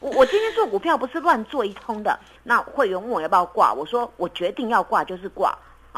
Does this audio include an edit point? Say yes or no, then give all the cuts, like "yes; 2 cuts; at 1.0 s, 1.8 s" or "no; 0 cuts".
yes; 1 cut; at 2.3 s